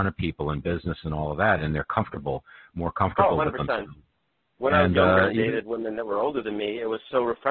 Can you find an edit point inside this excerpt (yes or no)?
no